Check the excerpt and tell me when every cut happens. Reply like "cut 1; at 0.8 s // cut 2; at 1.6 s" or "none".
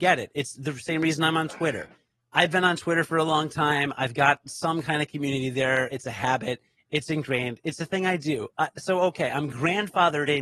none